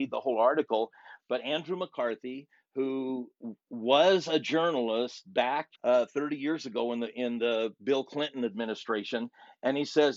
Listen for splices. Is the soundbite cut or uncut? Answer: cut